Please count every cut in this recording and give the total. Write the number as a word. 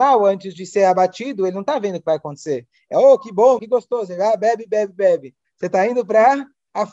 two